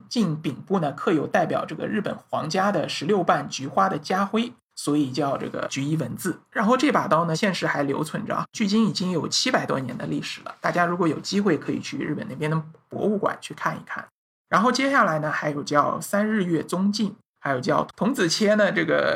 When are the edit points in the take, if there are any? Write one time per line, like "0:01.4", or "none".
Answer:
none